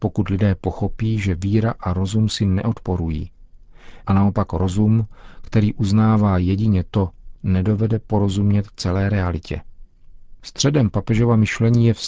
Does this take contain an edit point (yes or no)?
yes